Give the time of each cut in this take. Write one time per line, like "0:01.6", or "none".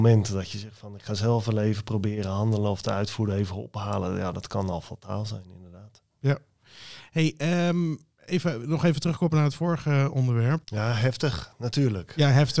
0:10.6